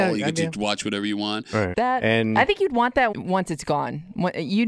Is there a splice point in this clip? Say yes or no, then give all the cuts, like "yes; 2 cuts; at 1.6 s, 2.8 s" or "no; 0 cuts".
yes; 2 cuts; at 1.7 s, 3.1 s